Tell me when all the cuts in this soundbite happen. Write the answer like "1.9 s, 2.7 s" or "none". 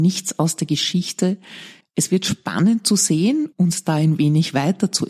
1.8 s, 3.5 s